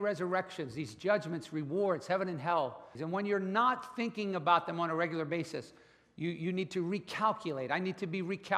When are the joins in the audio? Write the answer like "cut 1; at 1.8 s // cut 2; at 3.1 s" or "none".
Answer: cut 1; at 3.0 s